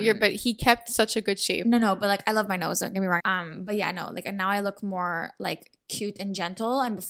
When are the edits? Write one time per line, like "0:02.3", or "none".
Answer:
0:03.2